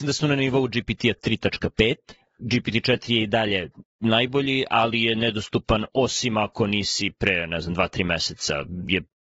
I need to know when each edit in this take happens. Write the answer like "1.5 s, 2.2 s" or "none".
2.4 s